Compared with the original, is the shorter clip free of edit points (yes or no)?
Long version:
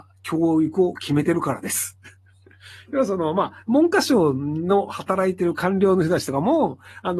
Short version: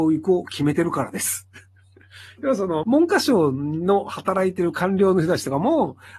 no